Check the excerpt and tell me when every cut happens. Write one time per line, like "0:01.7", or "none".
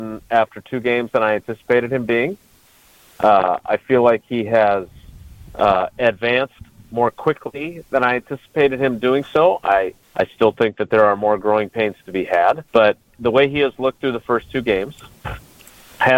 0:10.0
0:12.7